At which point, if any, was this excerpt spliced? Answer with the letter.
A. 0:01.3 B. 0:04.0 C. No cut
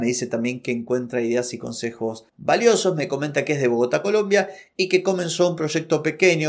C